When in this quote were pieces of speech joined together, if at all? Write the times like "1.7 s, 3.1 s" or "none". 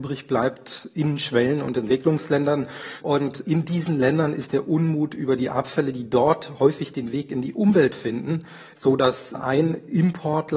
8.7 s